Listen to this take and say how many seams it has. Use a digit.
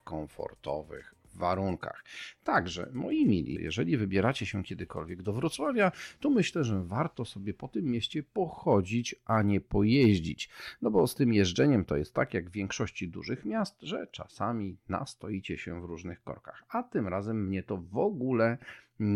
1